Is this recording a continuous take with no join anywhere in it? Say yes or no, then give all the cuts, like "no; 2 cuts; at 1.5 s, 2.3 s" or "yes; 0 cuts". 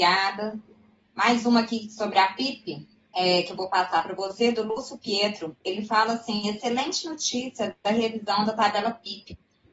yes; 0 cuts